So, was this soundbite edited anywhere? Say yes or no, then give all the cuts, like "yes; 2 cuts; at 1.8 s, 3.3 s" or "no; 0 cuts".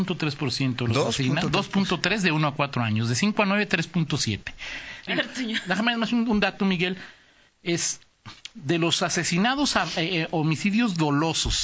yes; 1 cut; at 5.1 s